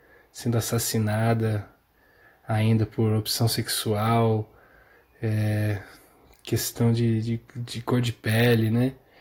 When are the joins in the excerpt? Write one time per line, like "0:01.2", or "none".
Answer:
none